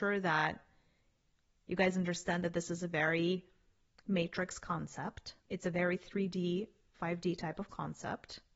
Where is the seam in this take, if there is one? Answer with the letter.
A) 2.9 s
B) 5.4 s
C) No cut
B